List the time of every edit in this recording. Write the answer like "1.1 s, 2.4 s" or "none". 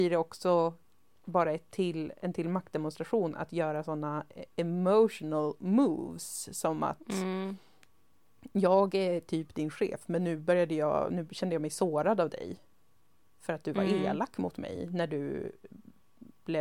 none